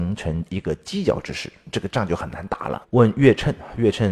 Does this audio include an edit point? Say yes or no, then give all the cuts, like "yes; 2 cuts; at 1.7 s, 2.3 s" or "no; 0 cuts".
yes; 1 cut; at 2.8 s